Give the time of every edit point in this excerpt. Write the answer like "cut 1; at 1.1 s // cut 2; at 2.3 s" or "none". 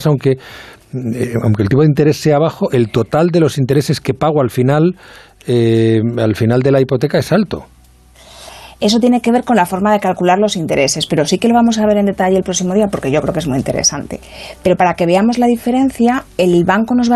none

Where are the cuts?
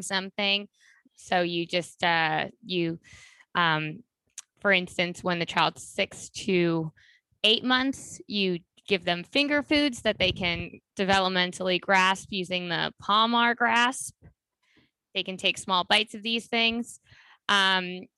cut 1; at 1.0 s

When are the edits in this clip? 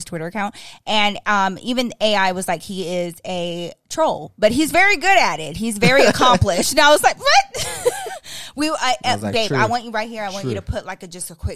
none

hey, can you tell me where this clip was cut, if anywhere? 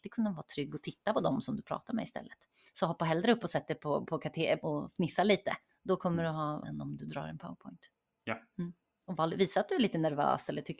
cut 1; at 4.6 s // cut 2; at 6.6 s

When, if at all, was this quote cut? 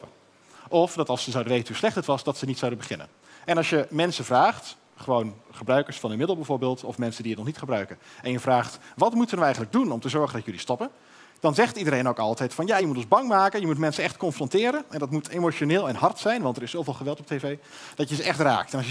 none

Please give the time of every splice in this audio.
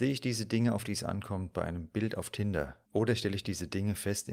cut 1; at 2.9 s

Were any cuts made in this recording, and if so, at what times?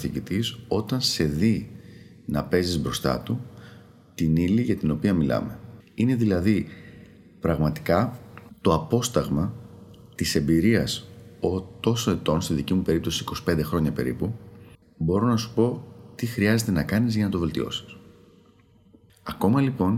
cut 1; at 5.8 s // cut 2; at 14.8 s

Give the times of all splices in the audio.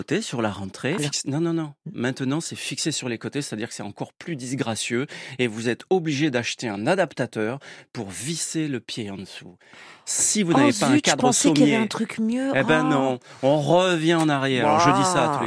cut 1; at 1.0 s

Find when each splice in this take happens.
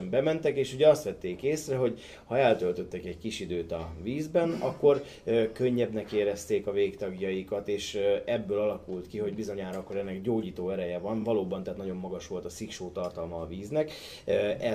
none

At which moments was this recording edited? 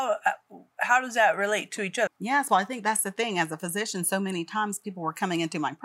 cut 1; at 2.1 s

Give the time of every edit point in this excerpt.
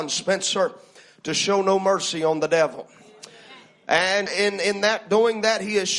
cut 1; at 4.3 s

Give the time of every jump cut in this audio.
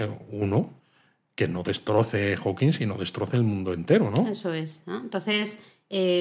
none

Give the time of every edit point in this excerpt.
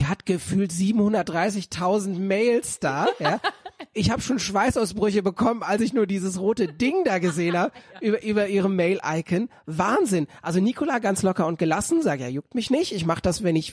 none

